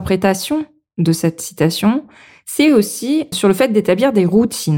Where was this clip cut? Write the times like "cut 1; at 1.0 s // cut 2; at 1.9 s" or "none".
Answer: cut 1; at 3.3 s